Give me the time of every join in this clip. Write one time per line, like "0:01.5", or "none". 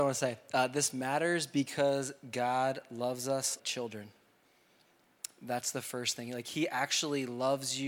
0:03.6